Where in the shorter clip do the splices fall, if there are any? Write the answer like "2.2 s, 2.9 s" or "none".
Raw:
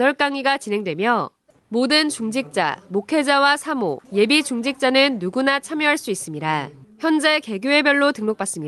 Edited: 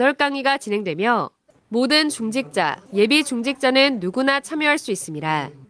2.9 s

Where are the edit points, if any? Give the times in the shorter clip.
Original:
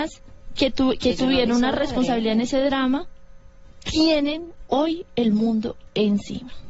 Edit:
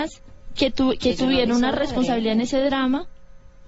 none

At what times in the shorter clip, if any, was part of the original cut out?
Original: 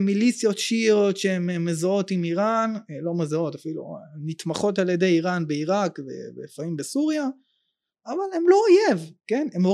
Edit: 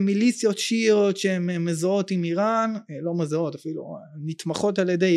none

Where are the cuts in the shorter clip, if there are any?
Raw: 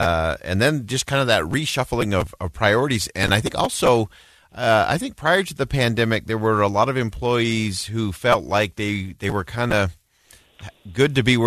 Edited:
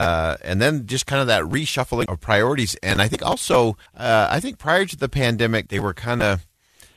2.1 s, 3.9 s, 5.7 s

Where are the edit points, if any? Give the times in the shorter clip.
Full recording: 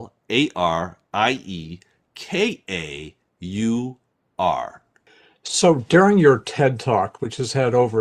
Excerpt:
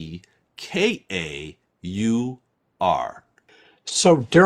none

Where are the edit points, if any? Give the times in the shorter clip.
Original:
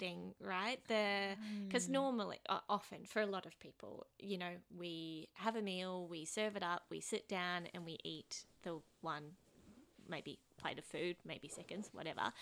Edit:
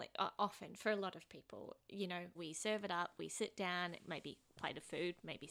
2.3 s, 4.0 s

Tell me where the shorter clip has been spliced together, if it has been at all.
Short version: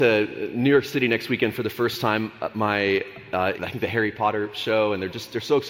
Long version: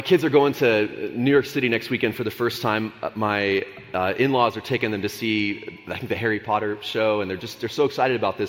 3.5 s

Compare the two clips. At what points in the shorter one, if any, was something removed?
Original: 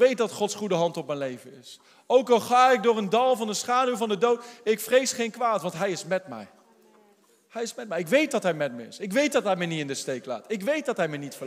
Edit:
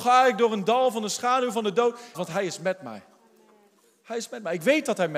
2.1 s

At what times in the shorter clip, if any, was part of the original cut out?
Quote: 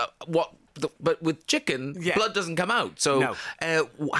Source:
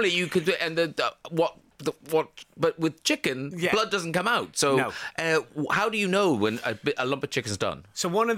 0.9 s

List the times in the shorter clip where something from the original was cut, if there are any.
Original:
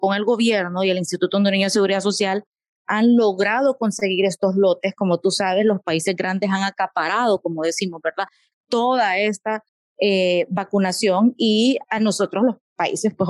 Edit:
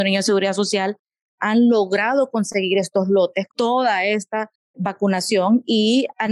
3.5 s, 4.7 s

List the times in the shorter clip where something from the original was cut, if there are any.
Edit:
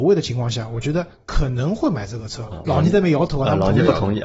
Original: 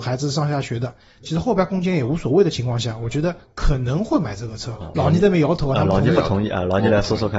none

